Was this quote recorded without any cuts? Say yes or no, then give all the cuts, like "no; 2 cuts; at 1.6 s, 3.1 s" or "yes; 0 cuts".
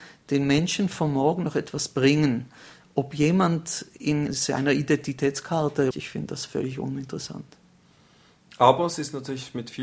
no; 2 cuts; at 4.3 s, 5.9 s